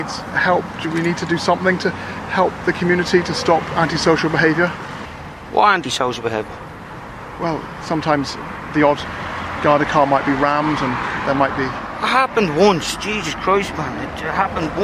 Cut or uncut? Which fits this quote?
uncut